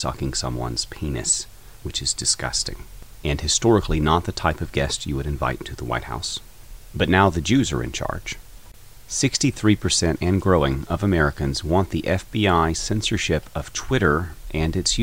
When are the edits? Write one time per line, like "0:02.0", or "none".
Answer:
none